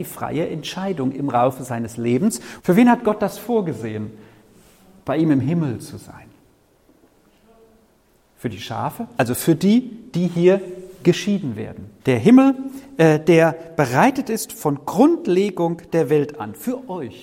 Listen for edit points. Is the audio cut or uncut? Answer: cut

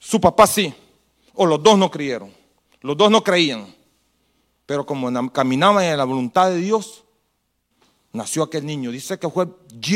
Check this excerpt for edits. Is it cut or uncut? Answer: uncut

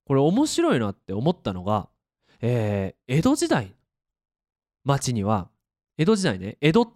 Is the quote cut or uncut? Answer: uncut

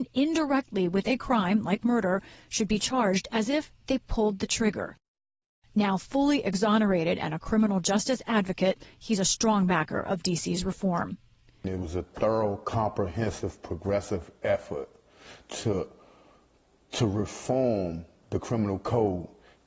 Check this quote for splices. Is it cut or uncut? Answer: uncut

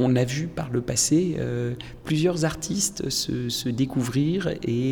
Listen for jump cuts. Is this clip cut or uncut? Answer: uncut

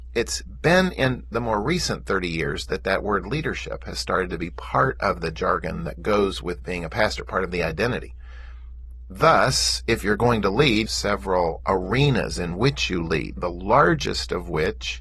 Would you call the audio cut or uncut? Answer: cut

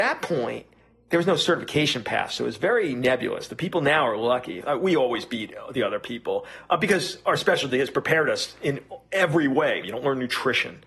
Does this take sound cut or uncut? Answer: cut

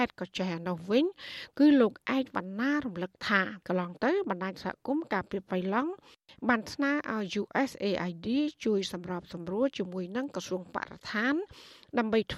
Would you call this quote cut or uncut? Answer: cut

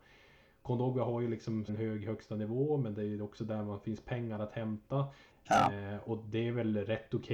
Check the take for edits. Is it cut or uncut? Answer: cut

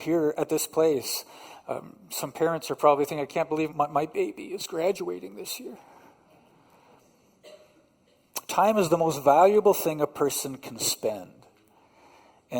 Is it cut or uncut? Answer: cut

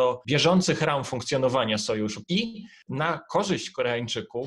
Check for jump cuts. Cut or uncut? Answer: cut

